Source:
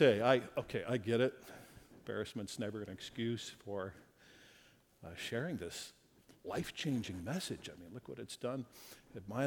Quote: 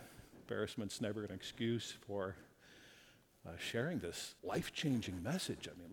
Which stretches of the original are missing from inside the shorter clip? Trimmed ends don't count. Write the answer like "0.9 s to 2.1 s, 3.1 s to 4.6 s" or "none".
6.0 s to 6.4 s